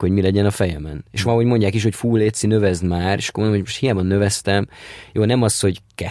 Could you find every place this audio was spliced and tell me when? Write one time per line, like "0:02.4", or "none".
none